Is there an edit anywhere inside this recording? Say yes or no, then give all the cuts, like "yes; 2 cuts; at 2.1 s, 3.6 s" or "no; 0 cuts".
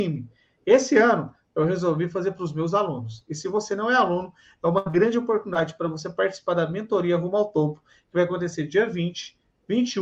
no; 0 cuts